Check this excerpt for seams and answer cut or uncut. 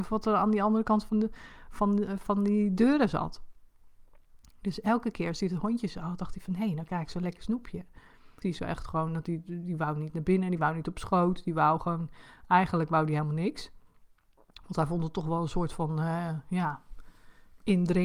cut